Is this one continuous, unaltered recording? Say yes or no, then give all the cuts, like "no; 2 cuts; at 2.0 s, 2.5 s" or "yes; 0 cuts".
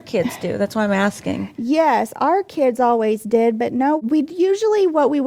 yes; 0 cuts